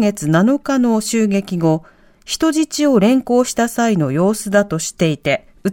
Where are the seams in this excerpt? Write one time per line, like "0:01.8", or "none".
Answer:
none